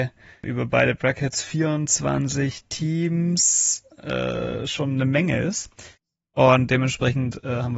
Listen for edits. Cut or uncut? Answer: uncut